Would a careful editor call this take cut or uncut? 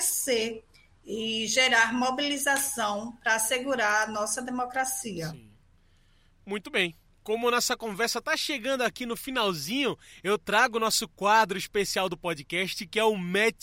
uncut